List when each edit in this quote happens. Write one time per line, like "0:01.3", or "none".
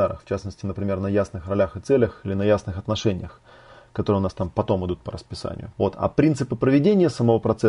0:05.7